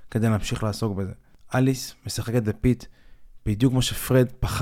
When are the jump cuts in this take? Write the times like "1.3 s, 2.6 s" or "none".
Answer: none